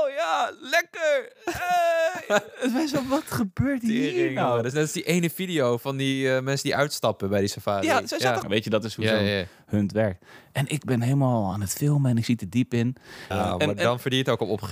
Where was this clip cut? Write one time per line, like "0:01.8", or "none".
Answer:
0:08.4
0:13.3